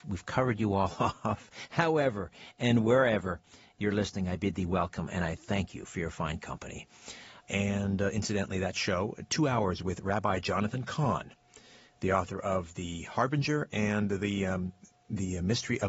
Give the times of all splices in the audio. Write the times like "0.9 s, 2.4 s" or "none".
7.4 s